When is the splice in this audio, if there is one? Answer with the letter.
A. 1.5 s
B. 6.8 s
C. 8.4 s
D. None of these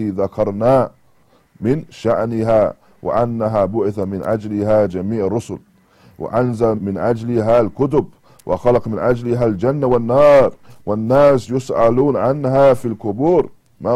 B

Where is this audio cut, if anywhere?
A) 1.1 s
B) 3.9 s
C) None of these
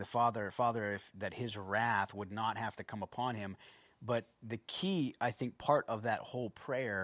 A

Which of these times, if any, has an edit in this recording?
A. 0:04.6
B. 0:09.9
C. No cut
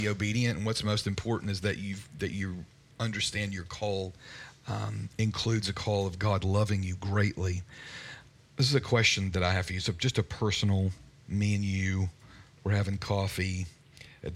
C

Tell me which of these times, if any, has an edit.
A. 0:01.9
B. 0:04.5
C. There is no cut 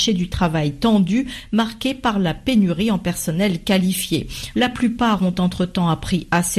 B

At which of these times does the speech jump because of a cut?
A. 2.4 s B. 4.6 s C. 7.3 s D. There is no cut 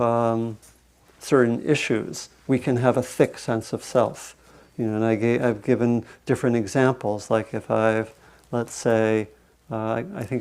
D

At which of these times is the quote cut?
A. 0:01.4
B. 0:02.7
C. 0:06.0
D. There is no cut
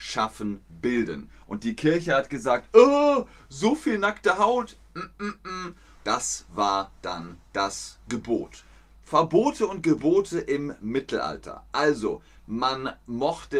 C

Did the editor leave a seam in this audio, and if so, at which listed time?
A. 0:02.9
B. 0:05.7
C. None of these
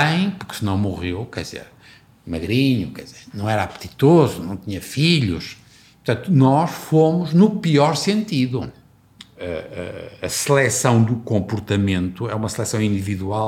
C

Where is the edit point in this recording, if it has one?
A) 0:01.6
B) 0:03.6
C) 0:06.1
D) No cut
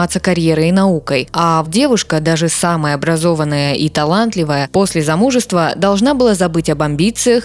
A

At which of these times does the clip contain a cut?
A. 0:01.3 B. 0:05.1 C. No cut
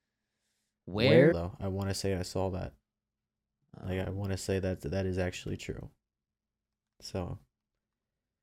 A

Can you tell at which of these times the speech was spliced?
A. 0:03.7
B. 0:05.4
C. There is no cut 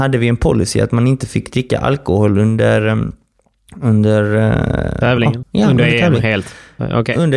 B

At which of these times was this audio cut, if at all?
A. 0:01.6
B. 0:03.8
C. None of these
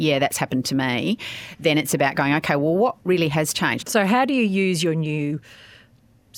B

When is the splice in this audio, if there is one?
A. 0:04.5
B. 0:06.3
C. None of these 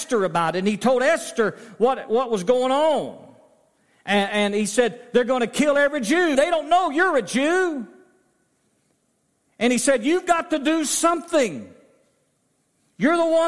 B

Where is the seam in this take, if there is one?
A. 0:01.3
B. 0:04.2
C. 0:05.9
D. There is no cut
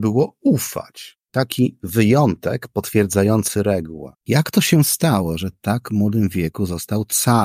B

